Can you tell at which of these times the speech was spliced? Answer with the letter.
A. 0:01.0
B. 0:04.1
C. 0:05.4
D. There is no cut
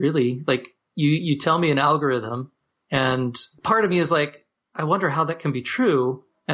D